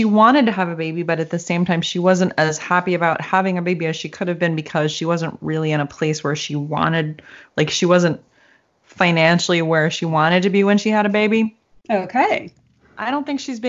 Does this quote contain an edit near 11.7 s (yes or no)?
yes